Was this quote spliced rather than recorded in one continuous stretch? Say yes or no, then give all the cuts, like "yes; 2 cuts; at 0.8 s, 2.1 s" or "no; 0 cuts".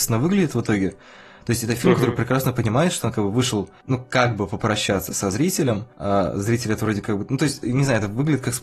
no; 0 cuts